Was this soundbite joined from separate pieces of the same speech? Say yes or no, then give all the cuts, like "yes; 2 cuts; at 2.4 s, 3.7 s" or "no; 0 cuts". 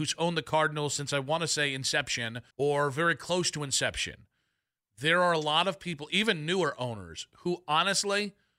yes; 1 cut; at 2.5 s